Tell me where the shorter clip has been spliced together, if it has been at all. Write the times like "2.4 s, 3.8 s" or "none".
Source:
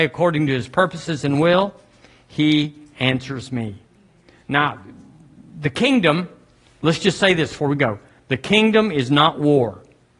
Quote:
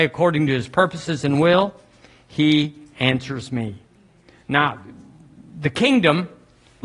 none

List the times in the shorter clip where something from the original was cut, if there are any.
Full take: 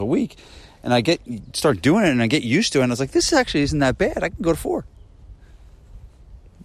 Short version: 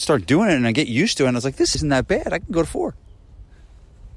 1.7 s

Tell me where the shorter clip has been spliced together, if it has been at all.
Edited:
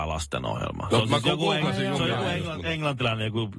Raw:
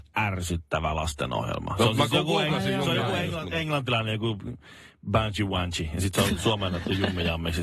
none

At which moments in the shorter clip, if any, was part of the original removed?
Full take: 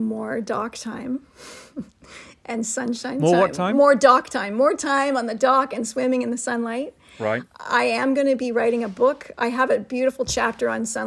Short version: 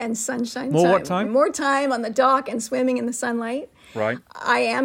1.2 s

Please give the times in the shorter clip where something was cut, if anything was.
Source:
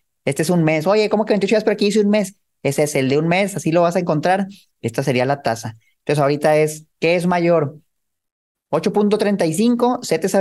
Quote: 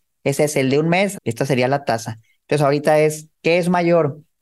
1.1 s

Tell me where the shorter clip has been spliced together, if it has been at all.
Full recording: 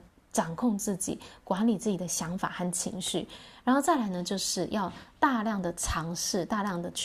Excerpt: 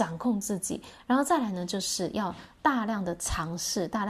1.0 s

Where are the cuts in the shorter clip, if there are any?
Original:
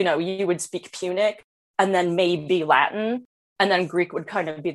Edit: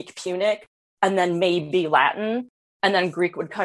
none

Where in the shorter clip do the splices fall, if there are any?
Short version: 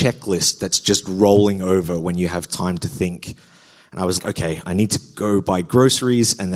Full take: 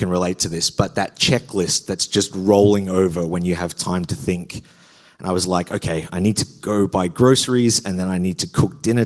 4.2 s

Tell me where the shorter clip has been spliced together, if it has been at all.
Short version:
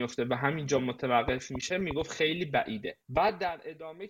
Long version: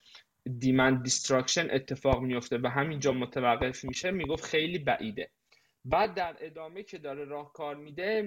3.0 s

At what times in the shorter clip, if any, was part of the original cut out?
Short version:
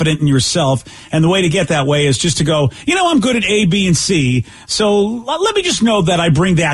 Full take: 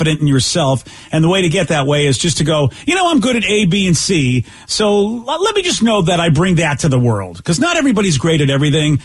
none

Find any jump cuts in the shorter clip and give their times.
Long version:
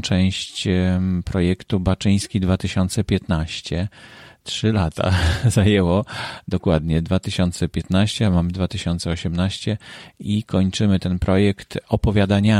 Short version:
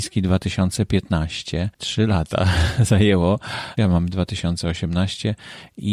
1.7 s, 3.8 s

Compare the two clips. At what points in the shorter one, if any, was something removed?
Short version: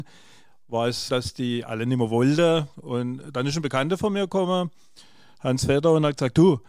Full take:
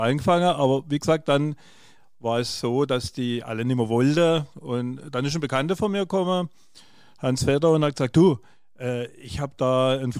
1.1 s

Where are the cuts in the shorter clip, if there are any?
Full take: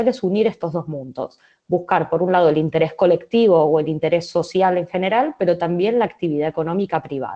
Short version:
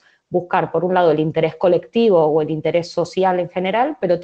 none

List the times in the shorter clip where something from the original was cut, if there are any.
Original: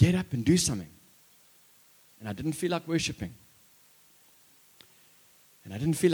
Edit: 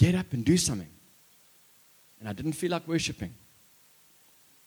none

